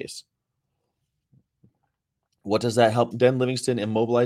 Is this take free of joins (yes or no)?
no